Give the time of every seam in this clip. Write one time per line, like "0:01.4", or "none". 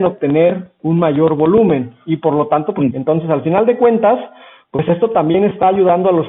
0:02.9